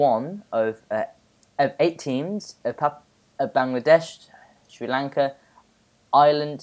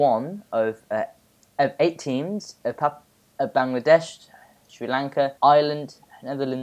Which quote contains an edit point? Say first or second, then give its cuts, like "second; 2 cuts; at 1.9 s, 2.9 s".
second; 1 cut; at 5.4 s